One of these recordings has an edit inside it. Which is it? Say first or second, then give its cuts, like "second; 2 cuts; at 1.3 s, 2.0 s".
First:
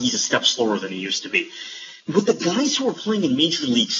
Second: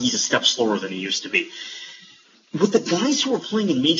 first; 1 cut; at 2.0 s